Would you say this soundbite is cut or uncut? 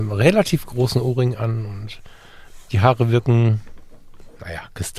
uncut